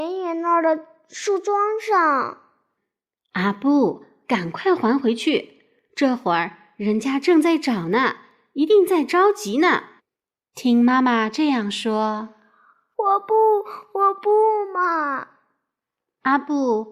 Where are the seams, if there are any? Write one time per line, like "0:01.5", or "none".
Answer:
none